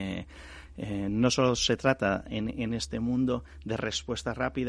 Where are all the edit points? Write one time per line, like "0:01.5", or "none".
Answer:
none